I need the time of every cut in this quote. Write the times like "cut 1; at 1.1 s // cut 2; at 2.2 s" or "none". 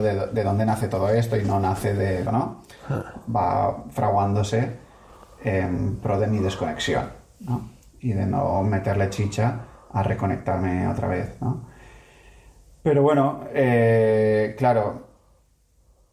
cut 1; at 2.3 s